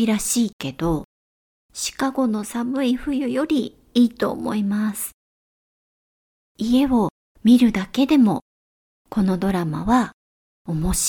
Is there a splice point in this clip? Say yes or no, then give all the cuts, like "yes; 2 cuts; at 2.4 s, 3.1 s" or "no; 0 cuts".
no; 0 cuts